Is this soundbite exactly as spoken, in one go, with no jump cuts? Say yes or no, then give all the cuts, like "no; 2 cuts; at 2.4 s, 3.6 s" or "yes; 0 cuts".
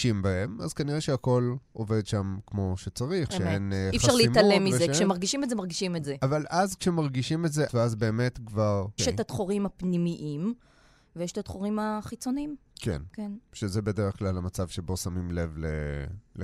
no; 2 cuts; at 7.7 s, 9.0 s